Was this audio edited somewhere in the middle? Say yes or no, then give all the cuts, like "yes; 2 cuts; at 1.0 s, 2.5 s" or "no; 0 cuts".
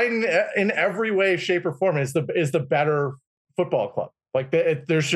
no; 0 cuts